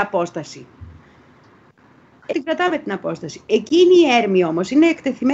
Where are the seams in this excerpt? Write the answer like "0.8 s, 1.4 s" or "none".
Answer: 2.3 s